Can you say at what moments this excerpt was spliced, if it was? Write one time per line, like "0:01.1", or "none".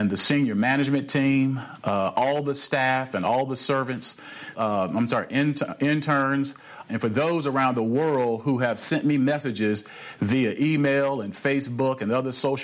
0:04.5
0:06.9